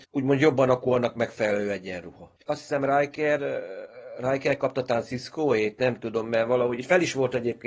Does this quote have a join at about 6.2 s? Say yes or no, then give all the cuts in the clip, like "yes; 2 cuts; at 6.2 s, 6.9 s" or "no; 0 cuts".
no; 1 cut; at 2.4 s